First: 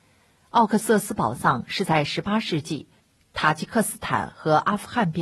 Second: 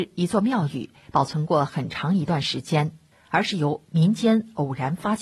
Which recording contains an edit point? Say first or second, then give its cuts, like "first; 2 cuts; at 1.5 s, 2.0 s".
second; 1 cut; at 3.1 s